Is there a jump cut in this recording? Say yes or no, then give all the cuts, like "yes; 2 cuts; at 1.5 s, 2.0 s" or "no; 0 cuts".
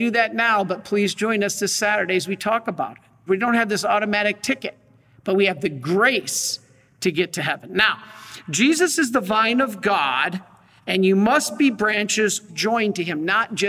yes; 2 cuts; at 3.3 s, 12.5 s